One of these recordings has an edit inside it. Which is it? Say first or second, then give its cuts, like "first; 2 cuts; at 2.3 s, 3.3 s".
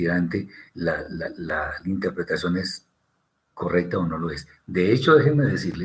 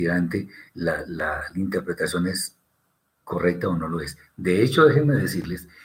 second; 1 cut; at 1.1 s